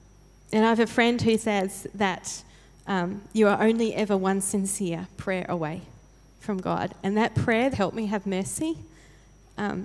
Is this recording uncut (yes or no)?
no